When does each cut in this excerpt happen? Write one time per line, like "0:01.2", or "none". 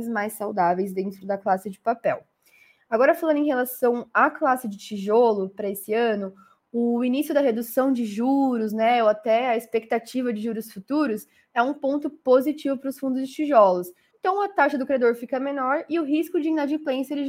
0:14.1